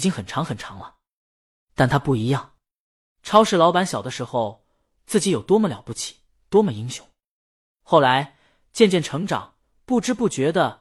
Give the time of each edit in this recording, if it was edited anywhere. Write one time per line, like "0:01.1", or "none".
0:05.0